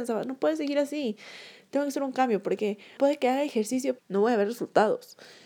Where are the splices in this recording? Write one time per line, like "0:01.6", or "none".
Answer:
0:03.0
0:04.0